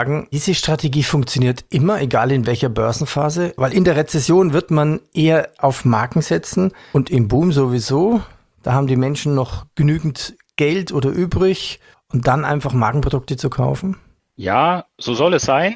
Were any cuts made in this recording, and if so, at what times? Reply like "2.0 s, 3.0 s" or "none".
3.6 s

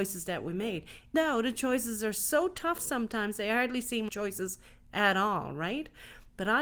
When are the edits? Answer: 1.1 s, 4.1 s

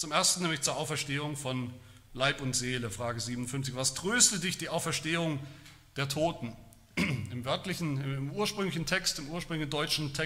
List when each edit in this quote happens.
none

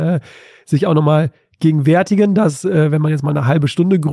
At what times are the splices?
none

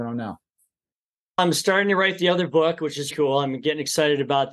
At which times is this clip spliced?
3.1 s

